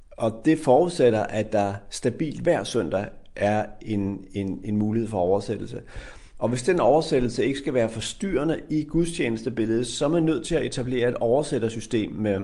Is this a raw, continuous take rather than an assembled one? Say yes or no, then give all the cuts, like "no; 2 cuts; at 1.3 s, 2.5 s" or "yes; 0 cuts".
yes; 0 cuts